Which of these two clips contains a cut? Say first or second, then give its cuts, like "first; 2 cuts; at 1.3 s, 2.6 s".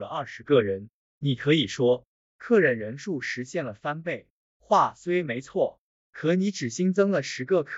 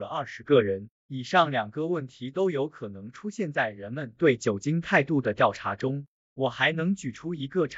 second; 1 cut; at 0.9 s